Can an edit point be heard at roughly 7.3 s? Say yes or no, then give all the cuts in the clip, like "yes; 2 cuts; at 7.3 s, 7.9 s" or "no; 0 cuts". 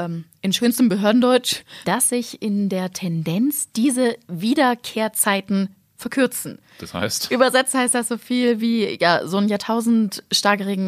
yes; 2 cuts; at 1.8 s, 7.3 s